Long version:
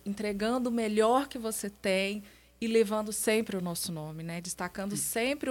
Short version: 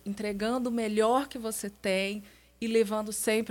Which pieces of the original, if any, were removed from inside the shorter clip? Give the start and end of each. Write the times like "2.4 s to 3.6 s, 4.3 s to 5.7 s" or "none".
none